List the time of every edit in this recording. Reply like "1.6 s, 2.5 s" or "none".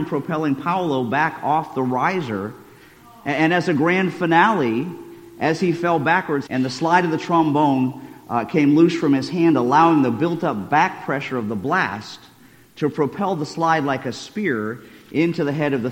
6.5 s